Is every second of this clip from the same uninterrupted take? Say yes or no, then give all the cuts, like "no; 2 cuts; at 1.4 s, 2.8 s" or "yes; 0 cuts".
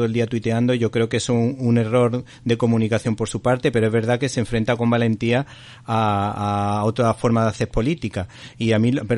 yes; 0 cuts